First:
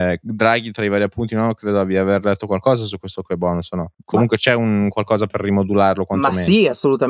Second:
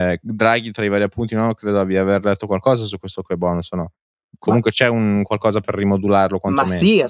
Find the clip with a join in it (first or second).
first